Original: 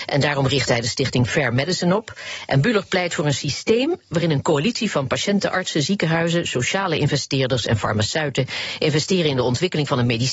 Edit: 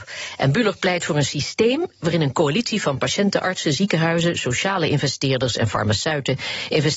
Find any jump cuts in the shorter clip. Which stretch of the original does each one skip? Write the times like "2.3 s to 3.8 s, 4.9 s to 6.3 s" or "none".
none